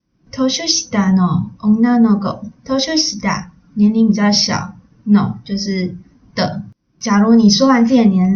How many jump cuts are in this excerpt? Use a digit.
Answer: 2